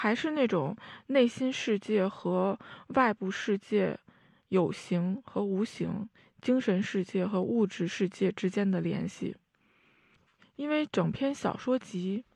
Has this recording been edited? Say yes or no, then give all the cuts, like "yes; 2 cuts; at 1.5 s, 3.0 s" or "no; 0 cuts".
no; 0 cuts